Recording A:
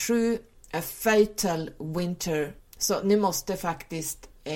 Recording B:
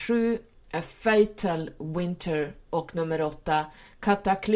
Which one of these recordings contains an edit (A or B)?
A